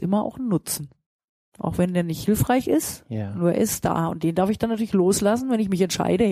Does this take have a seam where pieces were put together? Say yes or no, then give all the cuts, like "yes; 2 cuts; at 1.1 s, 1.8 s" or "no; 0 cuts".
no; 0 cuts